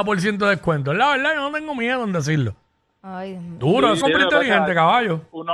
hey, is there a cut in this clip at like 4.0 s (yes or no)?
yes